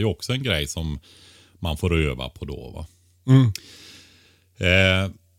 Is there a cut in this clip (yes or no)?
no